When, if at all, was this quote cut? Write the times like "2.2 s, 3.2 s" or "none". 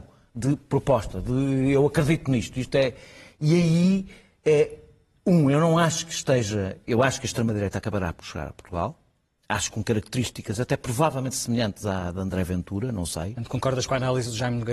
none